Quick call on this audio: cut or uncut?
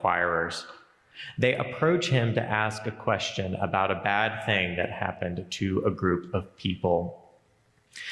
uncut